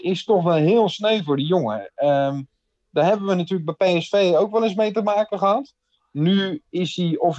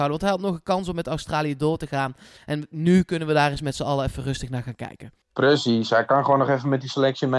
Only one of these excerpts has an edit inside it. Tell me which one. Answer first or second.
second